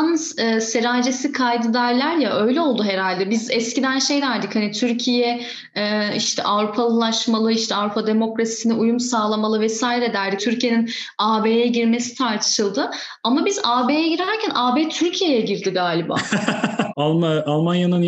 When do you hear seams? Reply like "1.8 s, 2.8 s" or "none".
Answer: 10.4 s, 16.9 s